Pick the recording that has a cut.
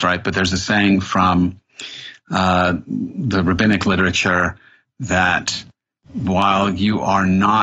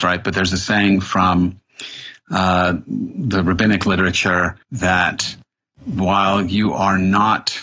second; 1 cut; at 4.6 s

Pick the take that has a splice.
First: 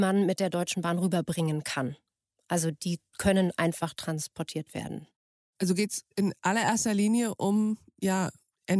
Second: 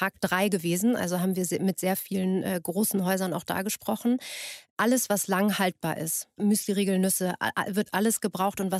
second; 1 cut; at 6.4 s

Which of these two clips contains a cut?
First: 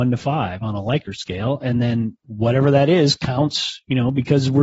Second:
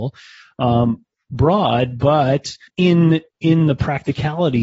second; 1 cut; at 2.7 s

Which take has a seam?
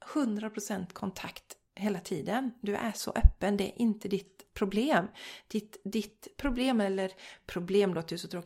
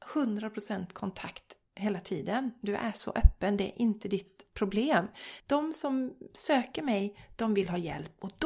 second; 1 cut; at 5.4 s

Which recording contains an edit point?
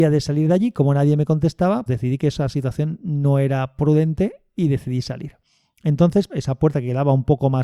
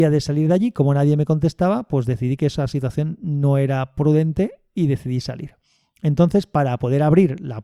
first; 2 cuts; at 1.9 s, 6.3 s

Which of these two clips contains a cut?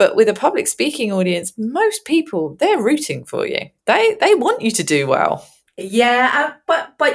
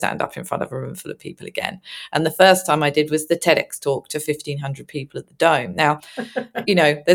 first; 1 cut; at 3.8 s

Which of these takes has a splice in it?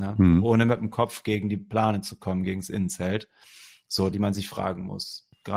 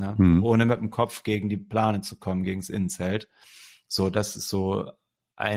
first; 1 cut; at 4.1 s

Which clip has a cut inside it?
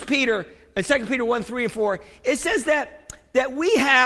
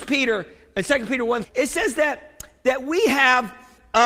second; 1 cut; at 1.4 s

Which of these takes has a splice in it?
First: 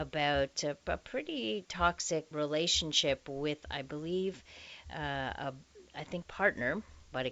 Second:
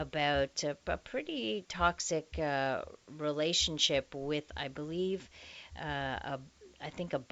first; 2 cuts; at 2.3 s, 6.2 s

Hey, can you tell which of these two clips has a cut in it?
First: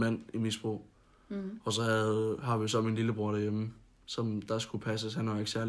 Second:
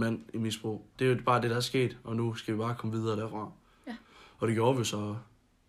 second; 1 cut; at 1.0 s

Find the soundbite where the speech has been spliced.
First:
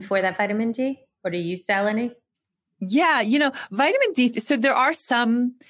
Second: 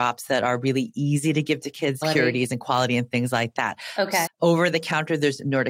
second; 2 cuts; at 2.0 s, 4.3 s

